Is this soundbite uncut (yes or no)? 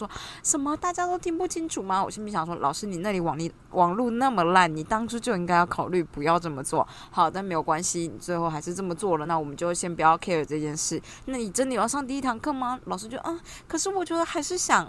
yes